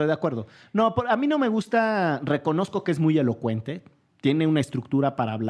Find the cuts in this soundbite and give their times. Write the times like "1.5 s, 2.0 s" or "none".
none